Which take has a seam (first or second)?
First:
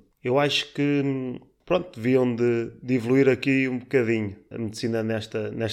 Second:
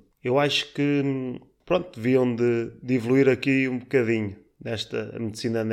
first